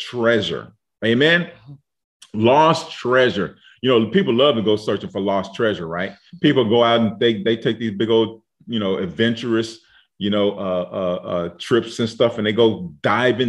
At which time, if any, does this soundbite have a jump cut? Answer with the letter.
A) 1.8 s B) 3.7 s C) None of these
C